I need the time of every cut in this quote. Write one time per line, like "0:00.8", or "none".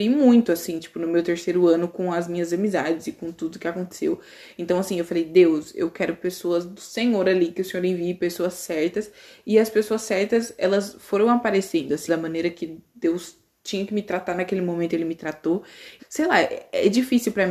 0:12.1
0:16.0